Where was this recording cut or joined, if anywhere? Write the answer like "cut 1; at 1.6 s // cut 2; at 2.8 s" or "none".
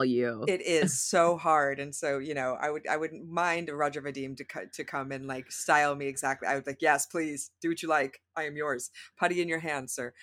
none